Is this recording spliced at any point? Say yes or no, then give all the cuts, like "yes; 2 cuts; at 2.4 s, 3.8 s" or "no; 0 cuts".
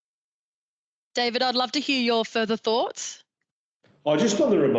no; 0 cuts